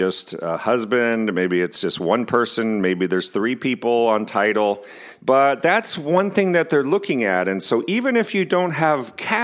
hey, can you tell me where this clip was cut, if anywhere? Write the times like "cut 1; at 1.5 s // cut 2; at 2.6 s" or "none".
cut 1; at 5.2 s